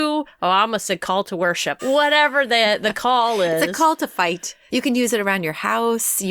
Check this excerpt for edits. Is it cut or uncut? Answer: cut